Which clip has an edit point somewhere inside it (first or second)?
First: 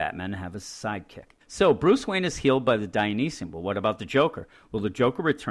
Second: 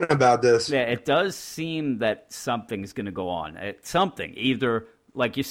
first